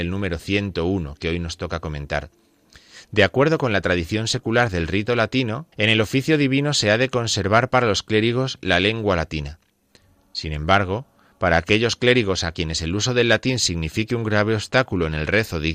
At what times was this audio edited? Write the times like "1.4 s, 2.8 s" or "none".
5.7 s